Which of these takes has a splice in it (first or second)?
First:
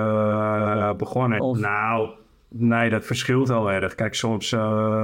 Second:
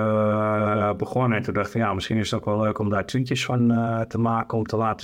first